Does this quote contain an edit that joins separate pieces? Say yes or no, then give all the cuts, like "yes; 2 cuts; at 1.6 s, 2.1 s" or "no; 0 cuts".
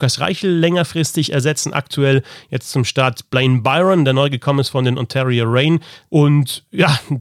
yes; 1 cut; at 6.1 s